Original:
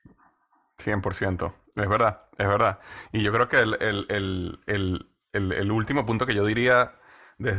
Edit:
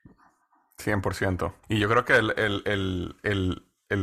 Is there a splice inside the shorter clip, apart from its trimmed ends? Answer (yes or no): yes